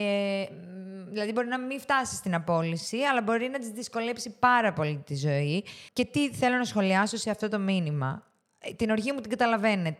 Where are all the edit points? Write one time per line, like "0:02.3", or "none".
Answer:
none